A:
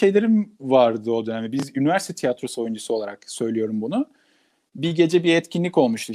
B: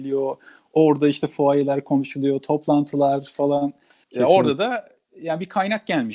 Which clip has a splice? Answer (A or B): B